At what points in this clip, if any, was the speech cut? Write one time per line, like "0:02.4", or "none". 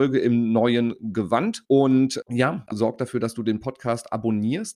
0:02.7